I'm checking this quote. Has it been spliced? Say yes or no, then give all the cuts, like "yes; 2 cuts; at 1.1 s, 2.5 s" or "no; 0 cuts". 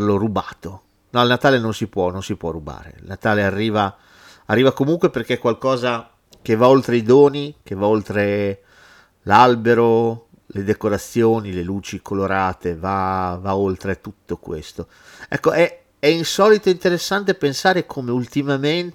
no; 0 cuts